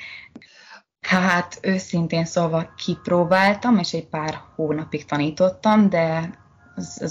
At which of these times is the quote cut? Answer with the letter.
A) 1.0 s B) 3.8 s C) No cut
A